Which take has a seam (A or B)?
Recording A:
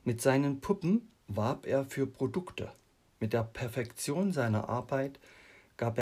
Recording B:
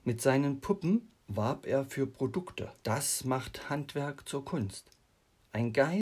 B